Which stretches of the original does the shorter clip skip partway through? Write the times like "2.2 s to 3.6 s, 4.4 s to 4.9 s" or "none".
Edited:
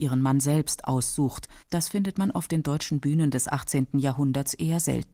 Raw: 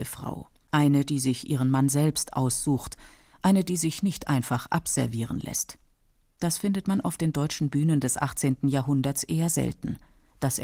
3.1 s to 6.3 s